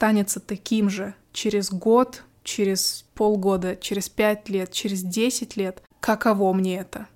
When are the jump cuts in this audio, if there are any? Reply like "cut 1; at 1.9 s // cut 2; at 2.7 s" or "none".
cut 1; at 3.1 s